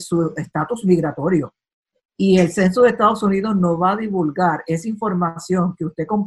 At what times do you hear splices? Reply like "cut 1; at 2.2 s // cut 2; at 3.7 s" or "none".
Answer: none